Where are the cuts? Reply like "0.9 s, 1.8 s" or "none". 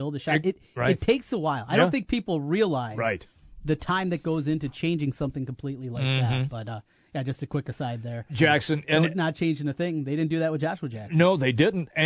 8.3 s